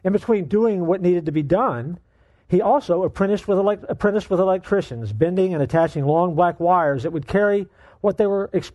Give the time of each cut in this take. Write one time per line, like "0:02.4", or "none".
none